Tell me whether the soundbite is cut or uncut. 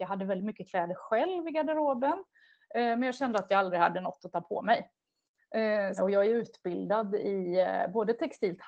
cut